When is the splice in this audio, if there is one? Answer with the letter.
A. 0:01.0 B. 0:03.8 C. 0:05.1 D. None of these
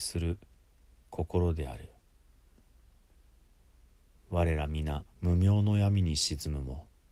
C